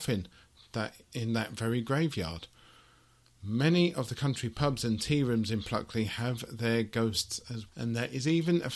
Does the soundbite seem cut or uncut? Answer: cut